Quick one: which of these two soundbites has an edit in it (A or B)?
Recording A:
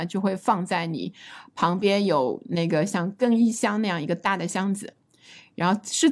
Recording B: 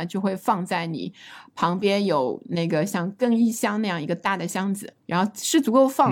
B